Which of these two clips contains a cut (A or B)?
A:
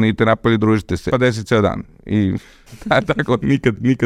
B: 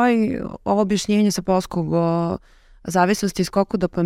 A